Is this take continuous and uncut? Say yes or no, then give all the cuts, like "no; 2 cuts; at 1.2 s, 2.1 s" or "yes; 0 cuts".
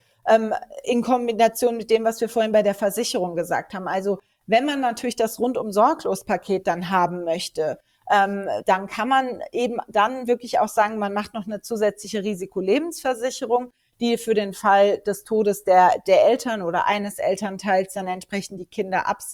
yes; 0 cuts